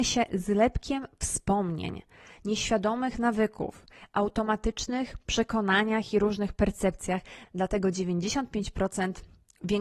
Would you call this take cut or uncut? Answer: cut